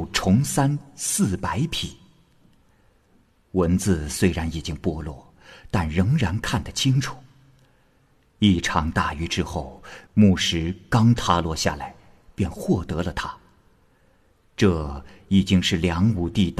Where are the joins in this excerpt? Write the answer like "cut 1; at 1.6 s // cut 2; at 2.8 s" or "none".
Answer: none